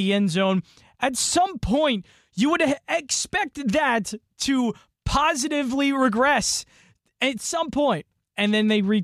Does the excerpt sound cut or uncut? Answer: uncut